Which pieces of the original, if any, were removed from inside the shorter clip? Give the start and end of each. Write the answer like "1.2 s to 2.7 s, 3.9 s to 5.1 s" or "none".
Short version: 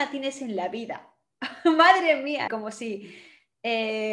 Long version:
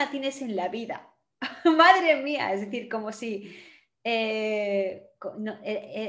2.5 s to 2.9 s